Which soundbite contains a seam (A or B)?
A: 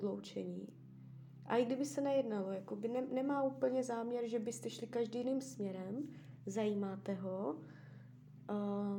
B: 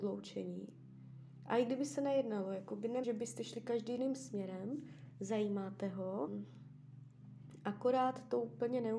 B